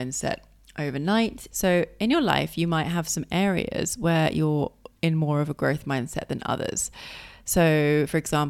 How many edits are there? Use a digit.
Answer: 1